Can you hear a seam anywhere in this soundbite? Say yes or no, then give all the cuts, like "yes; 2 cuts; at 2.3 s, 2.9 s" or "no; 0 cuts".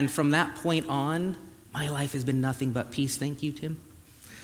no; 0 cuts